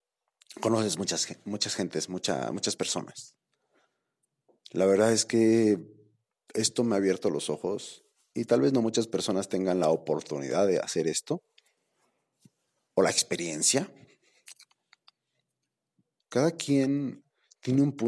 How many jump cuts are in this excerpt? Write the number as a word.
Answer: one